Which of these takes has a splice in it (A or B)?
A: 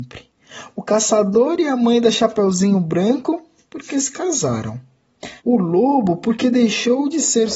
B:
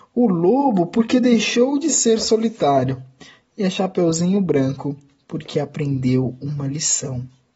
A